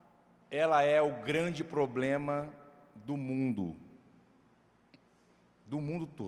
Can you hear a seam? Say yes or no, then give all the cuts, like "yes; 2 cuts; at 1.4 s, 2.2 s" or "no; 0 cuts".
no; 0 cuts